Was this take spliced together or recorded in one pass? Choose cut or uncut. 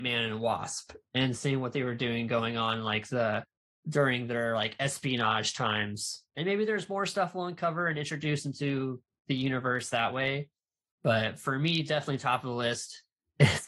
uncut